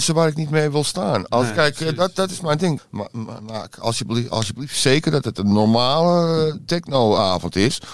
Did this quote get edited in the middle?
yes; 1 cut; at 2.8 s

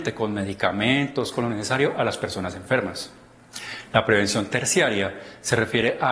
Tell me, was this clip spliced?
yes; 1 cut; at 1.3 s

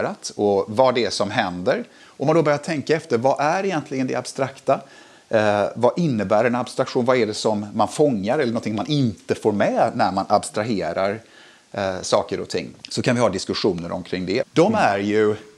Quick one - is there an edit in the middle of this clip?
yes; 3 cuts; at 2.0 s, 12.8 s, 14.4 s

